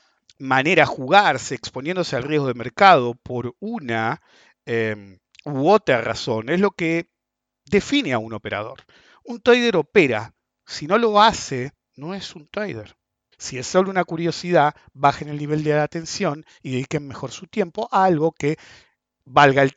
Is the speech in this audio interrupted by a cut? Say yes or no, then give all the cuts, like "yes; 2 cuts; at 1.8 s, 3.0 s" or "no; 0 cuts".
yes; 2 cuts; at 11.8 s, 13.3 s